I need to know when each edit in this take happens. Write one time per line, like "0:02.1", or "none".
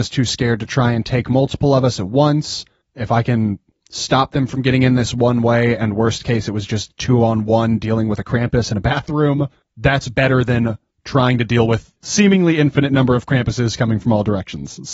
none